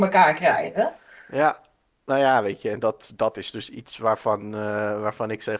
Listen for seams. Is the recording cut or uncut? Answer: uncut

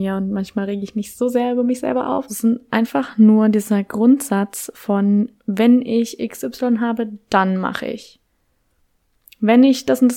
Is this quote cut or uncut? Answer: cut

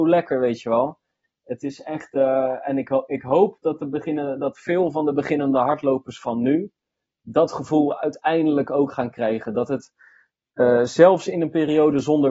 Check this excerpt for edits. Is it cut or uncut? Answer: uncut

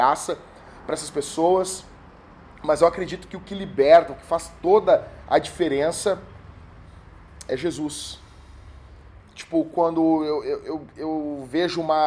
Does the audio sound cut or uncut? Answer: cut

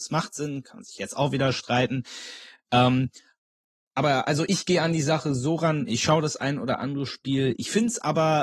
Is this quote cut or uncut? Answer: uncut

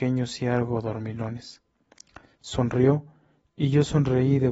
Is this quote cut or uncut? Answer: uncut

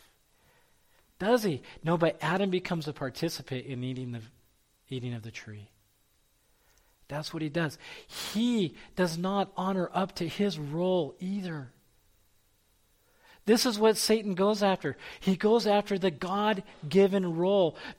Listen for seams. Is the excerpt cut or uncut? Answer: uncut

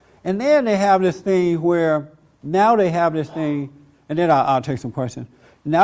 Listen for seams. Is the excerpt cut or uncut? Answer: uncut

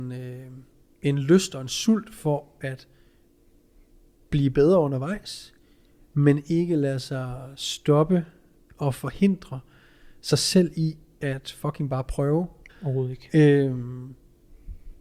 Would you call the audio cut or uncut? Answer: cut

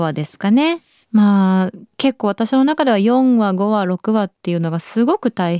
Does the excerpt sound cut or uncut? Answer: uncut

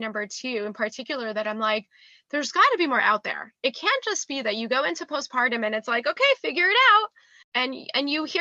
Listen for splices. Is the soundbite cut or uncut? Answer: cut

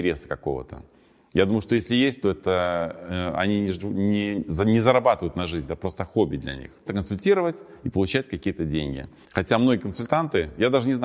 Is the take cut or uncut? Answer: cut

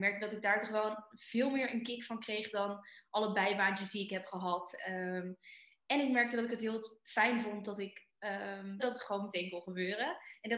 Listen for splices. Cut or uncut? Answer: cut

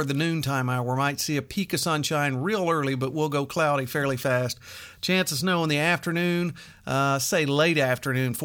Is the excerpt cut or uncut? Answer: uncut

